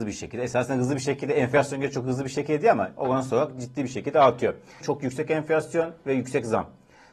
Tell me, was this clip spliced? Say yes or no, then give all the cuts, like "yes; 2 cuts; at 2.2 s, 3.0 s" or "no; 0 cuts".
yes; 1 cut; at 4.8 s